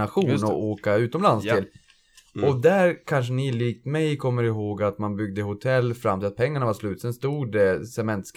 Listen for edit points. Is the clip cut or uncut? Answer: uncut